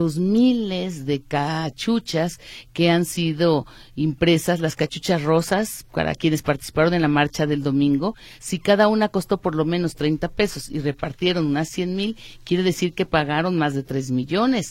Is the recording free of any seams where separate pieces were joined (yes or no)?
yes